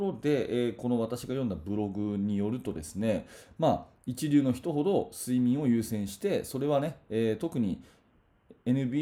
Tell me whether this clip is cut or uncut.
uncut